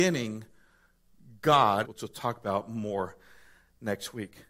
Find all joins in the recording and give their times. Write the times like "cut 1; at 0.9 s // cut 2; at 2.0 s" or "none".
cut 1; at 1.8 s

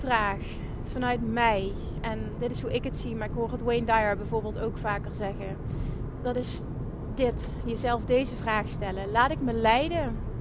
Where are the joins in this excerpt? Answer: cut 1; at 2.4 s

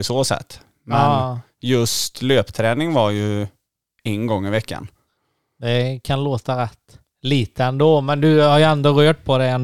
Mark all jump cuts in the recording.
none

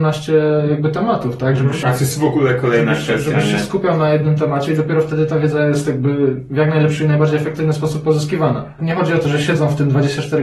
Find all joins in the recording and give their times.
cut 1; at 1.8 s // cut 2; at 8.8 s

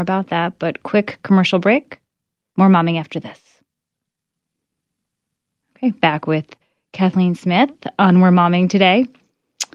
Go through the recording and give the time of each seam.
none

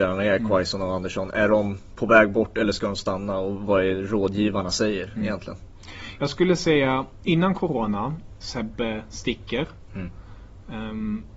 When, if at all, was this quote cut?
cut 1; at 8.4 s

